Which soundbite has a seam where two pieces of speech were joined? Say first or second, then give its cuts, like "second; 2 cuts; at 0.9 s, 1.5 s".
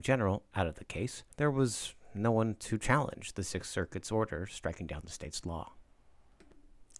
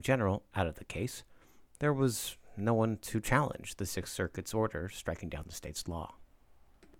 first; 1 cut; at 1.3 s